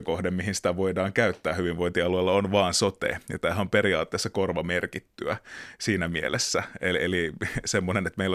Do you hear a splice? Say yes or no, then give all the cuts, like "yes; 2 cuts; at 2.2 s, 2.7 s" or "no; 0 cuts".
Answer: no; 0 cuts